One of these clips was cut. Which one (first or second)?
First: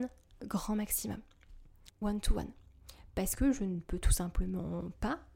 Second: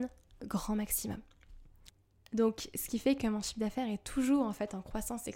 first